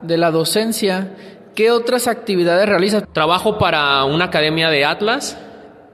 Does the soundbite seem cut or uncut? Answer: cut